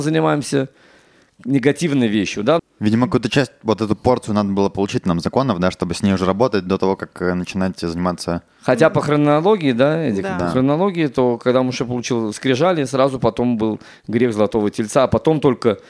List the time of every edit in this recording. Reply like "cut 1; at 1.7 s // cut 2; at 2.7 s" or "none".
cut 1; at 2.6 s

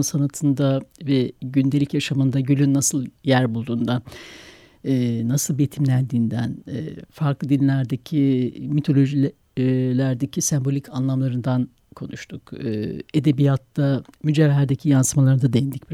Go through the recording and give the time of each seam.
none

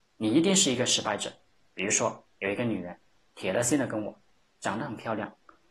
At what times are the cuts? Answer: none

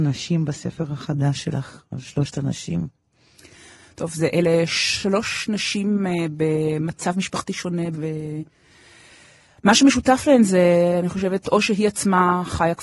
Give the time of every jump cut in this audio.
cut 1; at 7.9 s // cut 2; at 11.4 s

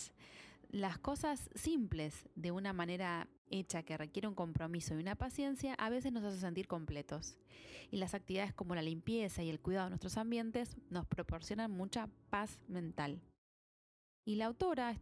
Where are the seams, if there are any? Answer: cut 1; at 3.4 s // cut 2; at 10.9 s

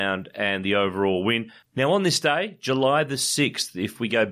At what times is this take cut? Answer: cut 1; at 1.6 s

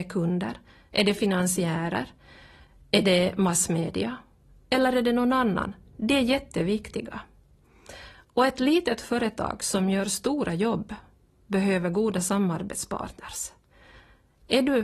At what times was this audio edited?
none

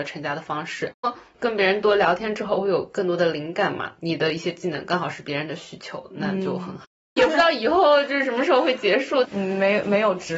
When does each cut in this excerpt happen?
cut 1; at 1.0 s // cut 2; at 7.2 s // cut 3; at 9.2 s

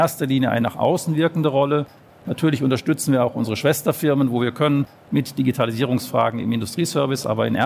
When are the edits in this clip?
none

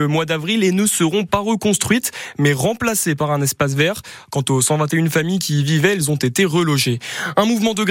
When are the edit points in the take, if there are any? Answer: none

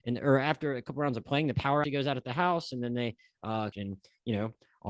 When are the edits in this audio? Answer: cut 1; at 1.8 s // cut 2; at 3.7 s

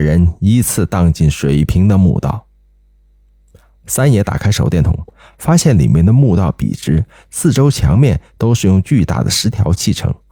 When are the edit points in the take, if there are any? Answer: none

